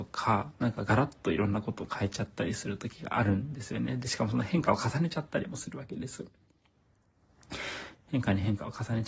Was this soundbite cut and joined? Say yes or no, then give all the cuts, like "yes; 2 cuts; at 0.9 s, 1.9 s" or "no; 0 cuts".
yes; 1 cut; at 7.9 s